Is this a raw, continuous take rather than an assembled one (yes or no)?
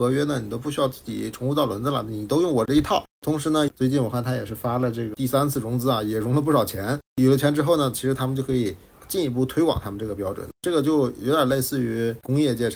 no